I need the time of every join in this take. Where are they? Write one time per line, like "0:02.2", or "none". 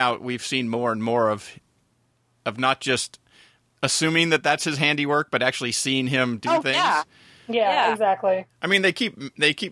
0:08.5